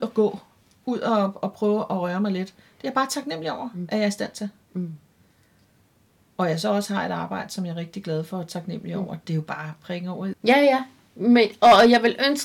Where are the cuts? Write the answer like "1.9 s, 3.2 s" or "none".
10.3 s